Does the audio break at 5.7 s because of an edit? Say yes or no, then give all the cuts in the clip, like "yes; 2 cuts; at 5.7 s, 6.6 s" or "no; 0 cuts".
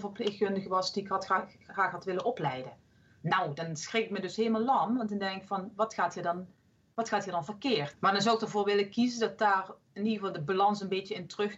no; 1 cut; at 7.9 s